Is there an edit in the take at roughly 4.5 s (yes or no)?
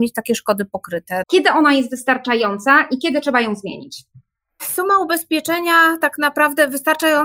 no